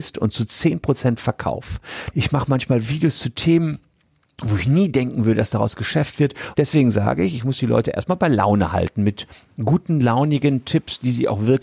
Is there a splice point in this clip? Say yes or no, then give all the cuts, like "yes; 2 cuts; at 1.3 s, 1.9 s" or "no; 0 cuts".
yes; 2 cuts; at 2.1 s, 6.5 s